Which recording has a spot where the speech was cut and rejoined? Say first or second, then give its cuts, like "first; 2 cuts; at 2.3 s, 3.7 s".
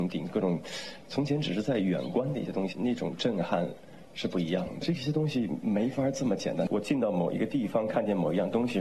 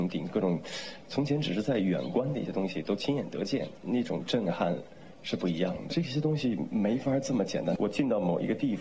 first; 1 cut; at 2.7 s